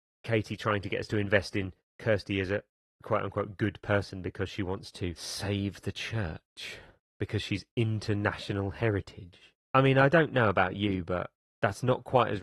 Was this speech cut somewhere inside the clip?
no; 0 cuts

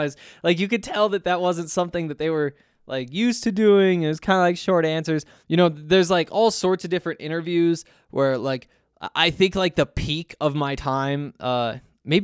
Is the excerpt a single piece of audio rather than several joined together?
yes; 0 cuts

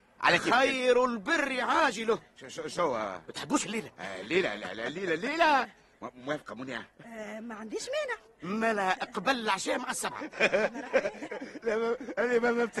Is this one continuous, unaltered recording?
yes; 0 cuts

